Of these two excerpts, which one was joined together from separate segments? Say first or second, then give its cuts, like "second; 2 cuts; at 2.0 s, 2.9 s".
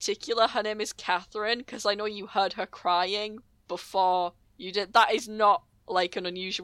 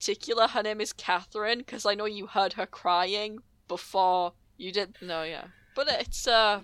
second; 1 cut; at 4.9 s